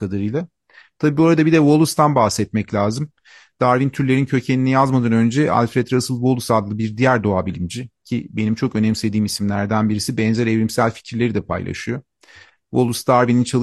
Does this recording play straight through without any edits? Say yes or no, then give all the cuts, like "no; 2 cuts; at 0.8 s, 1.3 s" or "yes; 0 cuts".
yes; 0 cuts